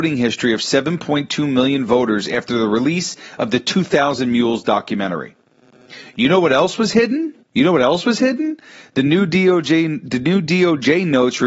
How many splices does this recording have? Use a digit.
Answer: 1